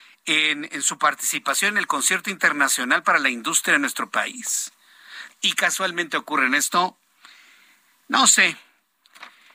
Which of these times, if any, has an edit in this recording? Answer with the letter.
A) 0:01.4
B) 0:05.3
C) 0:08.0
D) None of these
B